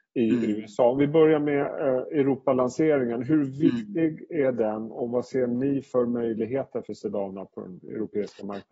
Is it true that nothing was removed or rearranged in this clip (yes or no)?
yes